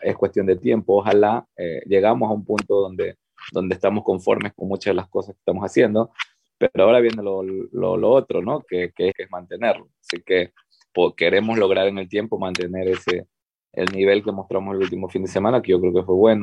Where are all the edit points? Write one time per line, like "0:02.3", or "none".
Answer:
0:09.1